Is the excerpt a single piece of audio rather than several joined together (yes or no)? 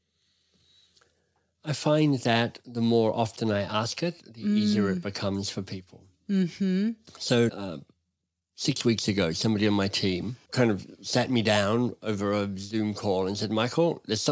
no